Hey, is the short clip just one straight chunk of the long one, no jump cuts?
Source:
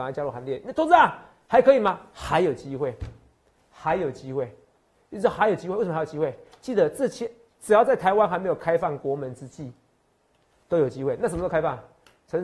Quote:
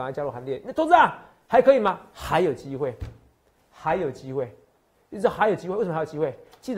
yes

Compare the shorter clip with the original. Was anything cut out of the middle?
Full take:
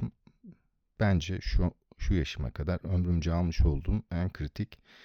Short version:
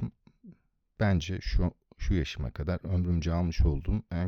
no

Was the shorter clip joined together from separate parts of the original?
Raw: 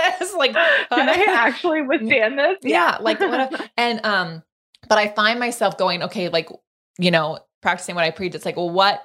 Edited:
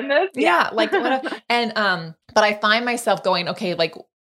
yes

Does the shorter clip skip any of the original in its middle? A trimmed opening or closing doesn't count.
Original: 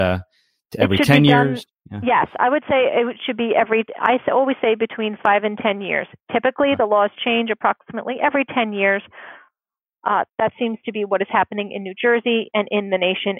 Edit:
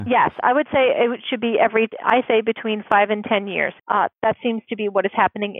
yes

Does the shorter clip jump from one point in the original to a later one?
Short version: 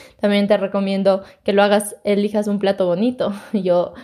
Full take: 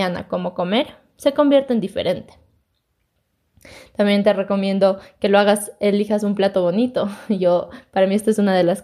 no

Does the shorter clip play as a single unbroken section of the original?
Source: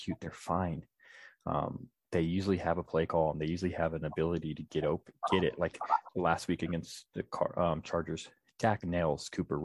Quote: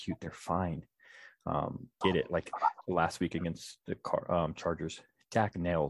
no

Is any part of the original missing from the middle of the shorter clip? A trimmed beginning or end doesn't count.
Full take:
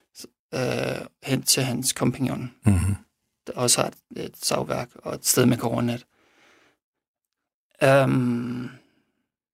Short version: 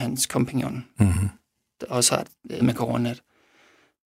yes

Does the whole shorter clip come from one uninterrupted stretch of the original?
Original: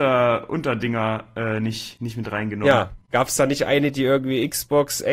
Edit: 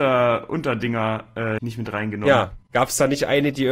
no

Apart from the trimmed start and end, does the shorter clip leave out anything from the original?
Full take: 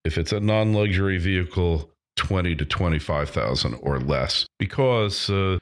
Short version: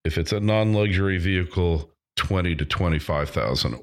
no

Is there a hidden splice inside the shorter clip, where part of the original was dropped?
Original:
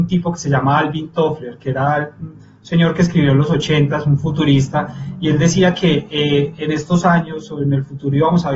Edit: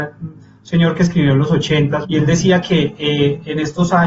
yes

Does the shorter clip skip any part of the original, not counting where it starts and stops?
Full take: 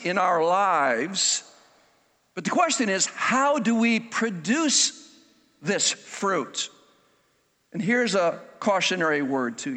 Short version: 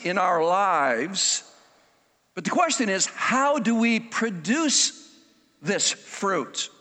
no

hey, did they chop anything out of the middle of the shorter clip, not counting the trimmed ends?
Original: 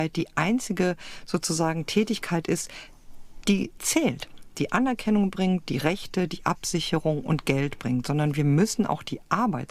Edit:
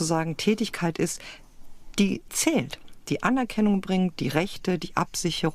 no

